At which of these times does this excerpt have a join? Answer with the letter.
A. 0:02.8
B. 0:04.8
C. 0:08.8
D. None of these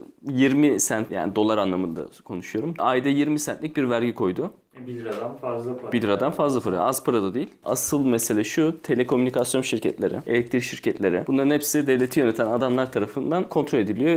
A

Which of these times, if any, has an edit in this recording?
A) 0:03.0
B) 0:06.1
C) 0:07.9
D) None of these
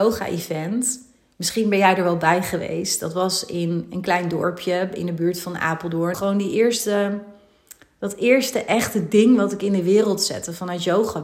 B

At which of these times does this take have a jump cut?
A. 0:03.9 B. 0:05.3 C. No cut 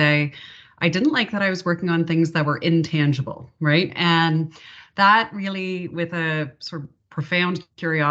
A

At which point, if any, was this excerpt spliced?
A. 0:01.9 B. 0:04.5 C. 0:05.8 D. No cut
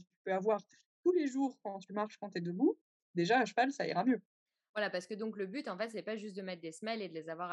D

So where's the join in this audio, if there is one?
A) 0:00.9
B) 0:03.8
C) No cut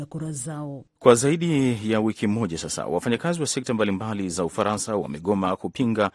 A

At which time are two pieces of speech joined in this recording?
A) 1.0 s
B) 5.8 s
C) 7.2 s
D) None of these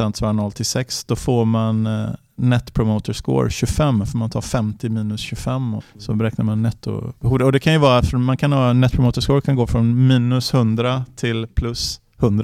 B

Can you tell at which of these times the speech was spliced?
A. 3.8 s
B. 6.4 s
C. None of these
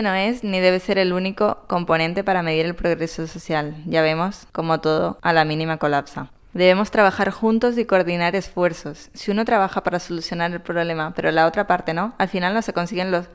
C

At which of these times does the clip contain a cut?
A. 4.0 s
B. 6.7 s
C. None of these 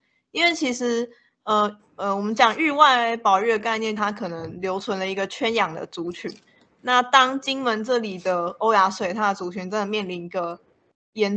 A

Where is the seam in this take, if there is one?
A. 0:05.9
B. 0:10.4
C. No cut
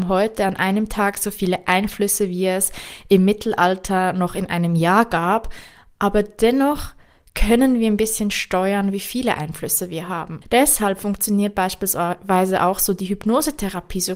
B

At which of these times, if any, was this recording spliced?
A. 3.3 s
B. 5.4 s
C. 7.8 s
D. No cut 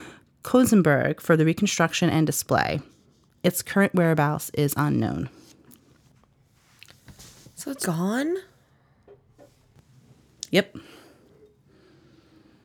C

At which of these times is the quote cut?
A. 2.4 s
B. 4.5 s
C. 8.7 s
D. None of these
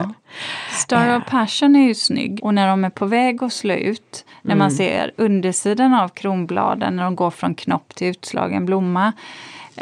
A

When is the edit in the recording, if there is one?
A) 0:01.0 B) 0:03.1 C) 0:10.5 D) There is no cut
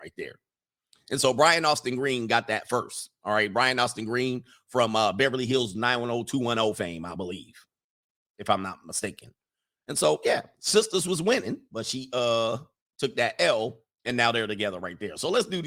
D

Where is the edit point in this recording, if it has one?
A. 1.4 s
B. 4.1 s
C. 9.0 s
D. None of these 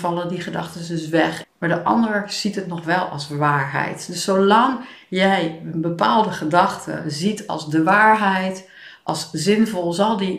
A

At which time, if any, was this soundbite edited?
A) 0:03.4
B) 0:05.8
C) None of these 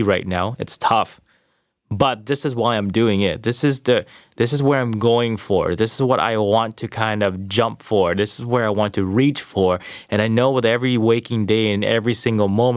C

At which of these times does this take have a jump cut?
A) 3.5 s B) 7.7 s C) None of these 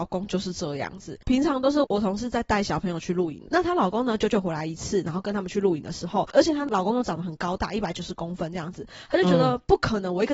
A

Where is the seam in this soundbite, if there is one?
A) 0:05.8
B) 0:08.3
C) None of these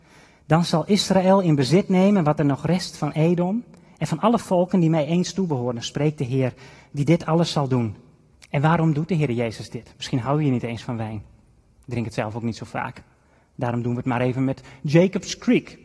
B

